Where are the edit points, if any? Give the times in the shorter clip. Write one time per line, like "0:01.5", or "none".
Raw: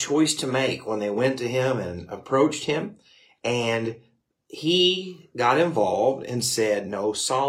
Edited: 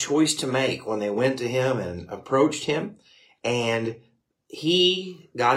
none